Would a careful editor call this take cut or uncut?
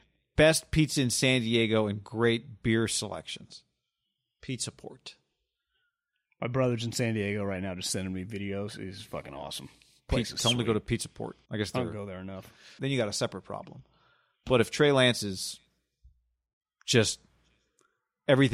cut